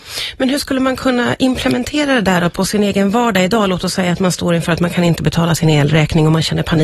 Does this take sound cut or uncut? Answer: uncut